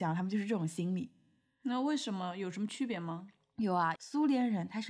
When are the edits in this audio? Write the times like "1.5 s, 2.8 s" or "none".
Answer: 4.0 s